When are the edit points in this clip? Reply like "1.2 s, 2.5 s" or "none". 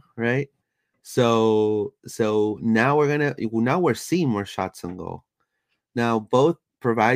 none